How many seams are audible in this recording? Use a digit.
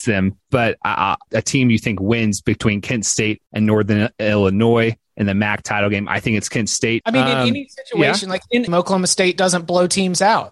3